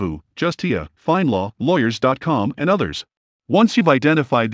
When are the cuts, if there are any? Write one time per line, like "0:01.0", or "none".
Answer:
0:03.3